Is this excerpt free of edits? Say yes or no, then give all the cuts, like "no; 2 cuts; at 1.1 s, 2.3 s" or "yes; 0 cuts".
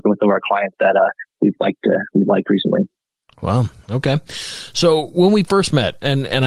yes; 0 cuts